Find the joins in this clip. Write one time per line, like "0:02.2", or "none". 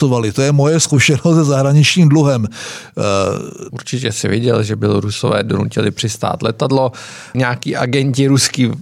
0:03.7
0:07.3